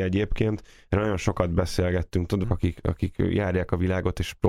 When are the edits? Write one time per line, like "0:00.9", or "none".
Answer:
0:02.4